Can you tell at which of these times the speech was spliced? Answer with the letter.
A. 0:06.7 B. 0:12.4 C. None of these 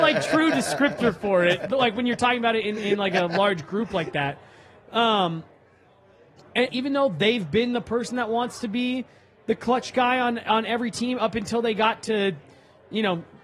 A